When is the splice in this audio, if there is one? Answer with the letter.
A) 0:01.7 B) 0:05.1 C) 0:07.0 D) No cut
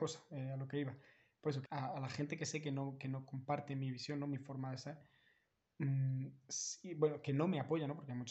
A